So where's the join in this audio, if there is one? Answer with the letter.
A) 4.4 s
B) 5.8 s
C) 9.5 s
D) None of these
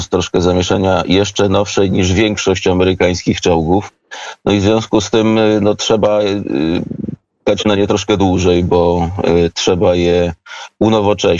D